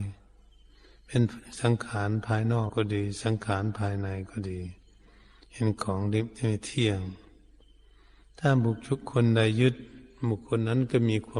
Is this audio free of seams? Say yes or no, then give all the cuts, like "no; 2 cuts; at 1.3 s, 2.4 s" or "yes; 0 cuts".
no; 1 cut; at 2.7 s